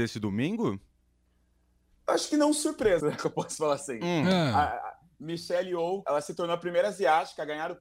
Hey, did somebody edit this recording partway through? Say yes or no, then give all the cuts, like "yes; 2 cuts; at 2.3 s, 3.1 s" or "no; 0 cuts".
yes; 2 cuts; at 3.0 s, 6.0 s